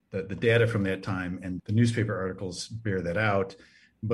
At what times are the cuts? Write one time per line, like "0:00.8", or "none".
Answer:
0:01.6